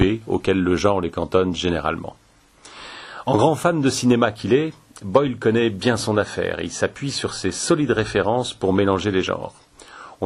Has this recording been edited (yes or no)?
no